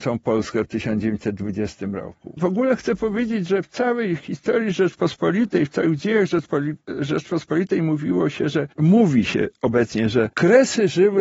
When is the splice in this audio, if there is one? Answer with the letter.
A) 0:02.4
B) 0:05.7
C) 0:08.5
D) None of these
A